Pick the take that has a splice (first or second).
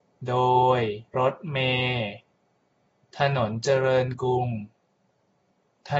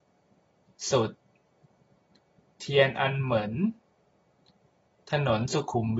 first